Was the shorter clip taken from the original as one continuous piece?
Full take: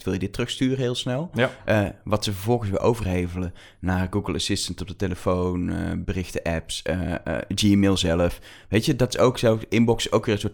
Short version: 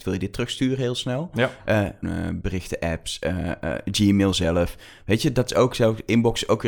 no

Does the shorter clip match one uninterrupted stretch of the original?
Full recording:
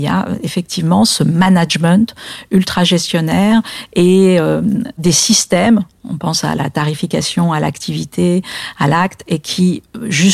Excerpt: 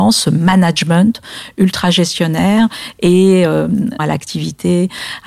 no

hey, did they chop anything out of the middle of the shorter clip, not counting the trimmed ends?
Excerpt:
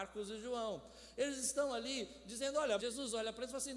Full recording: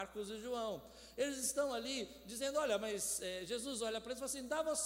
yes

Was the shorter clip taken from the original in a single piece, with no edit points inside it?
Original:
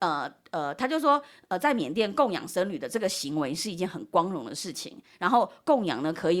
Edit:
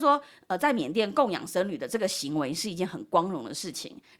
yes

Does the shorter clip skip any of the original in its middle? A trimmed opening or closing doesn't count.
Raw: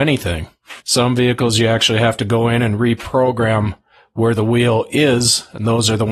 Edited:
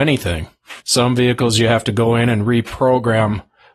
yes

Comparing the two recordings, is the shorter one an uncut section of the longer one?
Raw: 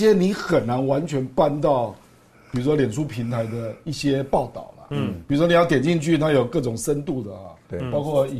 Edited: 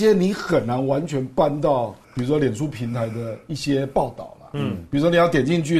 no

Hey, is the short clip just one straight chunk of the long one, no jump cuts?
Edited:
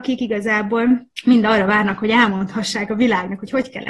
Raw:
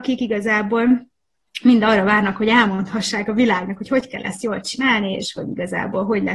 no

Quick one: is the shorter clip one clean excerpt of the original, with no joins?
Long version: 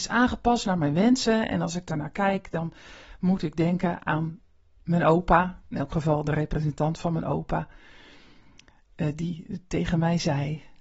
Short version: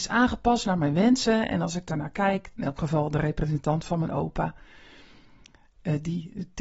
no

